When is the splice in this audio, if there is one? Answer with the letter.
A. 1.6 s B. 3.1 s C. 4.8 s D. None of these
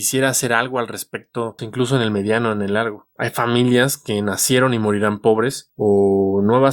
A